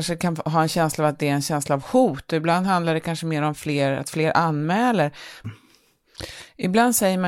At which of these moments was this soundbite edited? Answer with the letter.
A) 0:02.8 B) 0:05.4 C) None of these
B